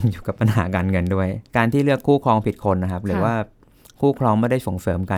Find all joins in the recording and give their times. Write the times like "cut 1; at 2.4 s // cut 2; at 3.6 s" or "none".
cut 1; at 1.5 s

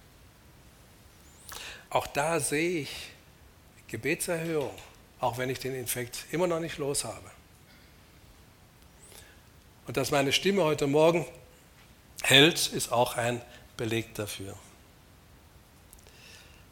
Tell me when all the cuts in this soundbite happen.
cut 1; at 1.9 s

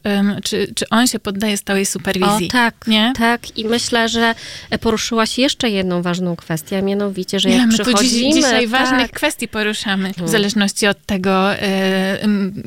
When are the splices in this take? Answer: cut 1; at 10.2 s

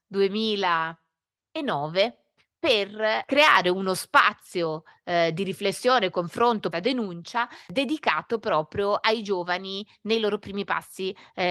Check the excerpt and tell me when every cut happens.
cut 1; at 6.7 s

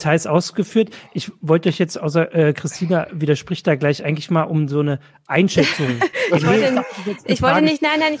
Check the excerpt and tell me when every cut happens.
none

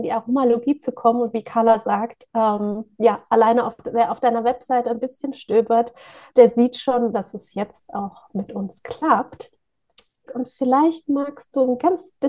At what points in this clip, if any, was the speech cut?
cut 1; at 7.1 s // cut 2; at 10.3 s

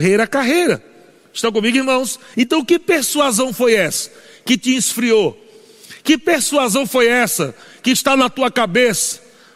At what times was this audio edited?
cut 1; at 2.3 s

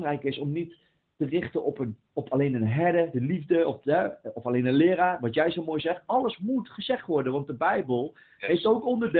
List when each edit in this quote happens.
none

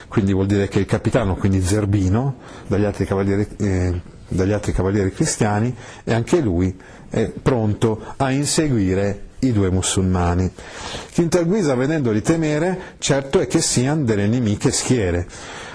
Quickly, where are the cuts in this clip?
cut 1; at 2.6 s

